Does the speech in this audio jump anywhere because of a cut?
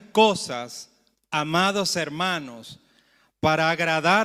no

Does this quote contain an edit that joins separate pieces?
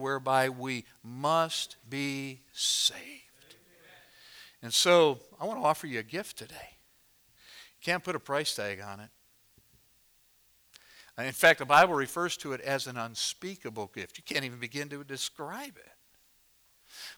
no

